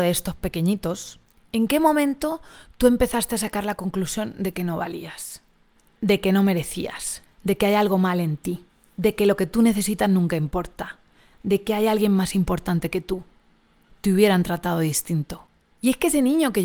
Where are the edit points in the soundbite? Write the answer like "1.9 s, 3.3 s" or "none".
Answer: 13.9 s

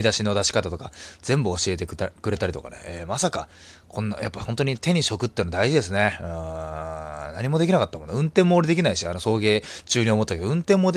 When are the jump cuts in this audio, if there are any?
none

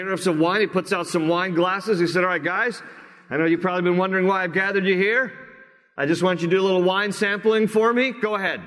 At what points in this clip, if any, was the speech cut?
none

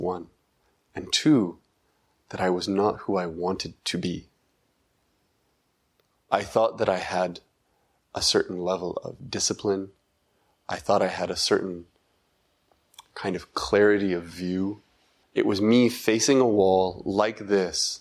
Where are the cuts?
6.2 s, 15.2 s

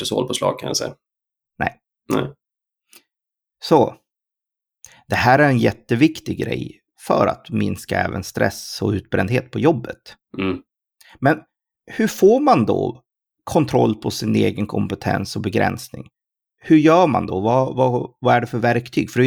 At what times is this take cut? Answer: none

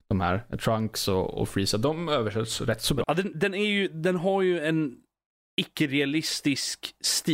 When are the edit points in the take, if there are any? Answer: 3.0 s

